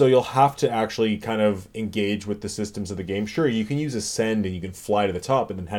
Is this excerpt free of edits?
yes; 0 cuts

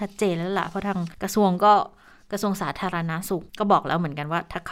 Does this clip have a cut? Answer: yes; 2 cuts; at 1.1 s, 3.5 s

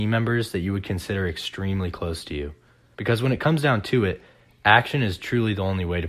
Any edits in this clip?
yes; 1 cut; at 2.9 s

